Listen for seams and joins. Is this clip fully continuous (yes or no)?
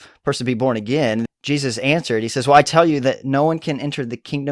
no